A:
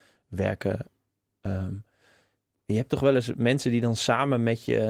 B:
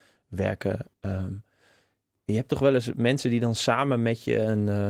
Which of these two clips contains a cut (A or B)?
B